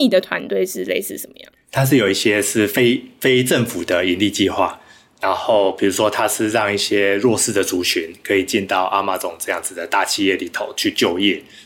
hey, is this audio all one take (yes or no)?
yes